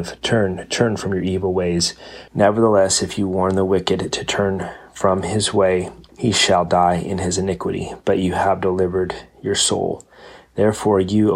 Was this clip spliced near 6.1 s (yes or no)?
yes